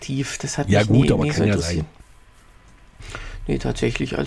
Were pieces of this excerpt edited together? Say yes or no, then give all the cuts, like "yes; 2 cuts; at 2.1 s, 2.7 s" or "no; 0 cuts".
no; 0 cuts